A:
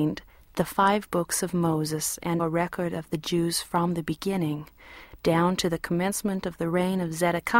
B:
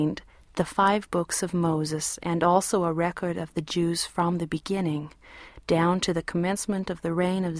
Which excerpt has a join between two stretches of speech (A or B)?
A